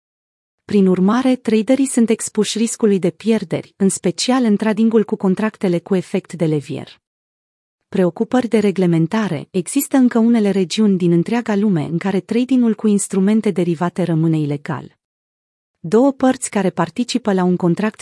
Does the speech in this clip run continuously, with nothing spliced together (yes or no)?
yes